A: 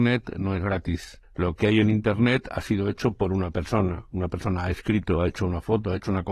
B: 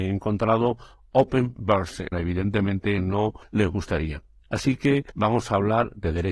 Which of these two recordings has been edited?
B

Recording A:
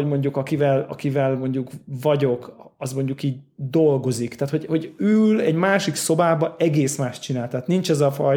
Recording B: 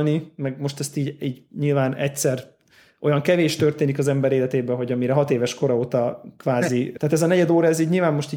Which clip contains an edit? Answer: B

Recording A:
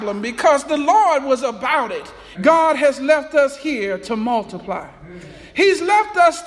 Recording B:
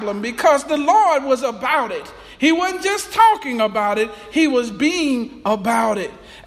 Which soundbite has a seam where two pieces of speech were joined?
A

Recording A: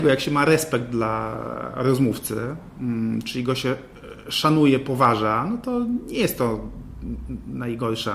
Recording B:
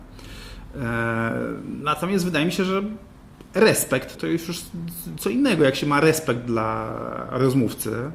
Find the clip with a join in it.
B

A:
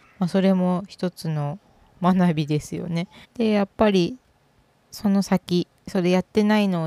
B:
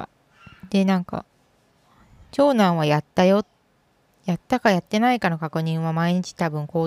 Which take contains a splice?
A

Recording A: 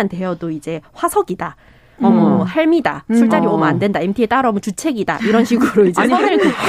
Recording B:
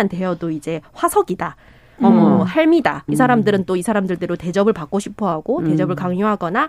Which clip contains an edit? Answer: B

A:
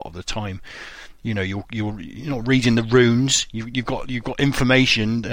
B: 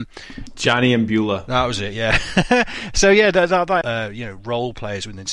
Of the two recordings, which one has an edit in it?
B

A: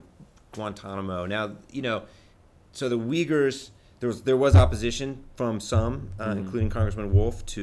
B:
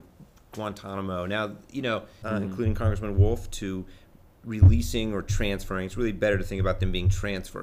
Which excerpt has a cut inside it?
B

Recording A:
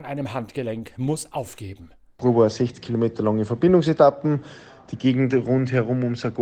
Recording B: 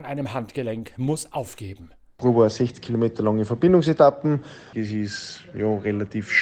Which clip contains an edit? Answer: B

